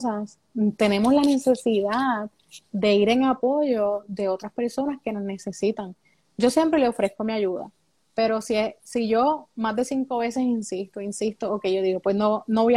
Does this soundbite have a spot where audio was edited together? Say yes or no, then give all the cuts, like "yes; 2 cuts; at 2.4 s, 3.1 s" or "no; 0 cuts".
no; 0 cuts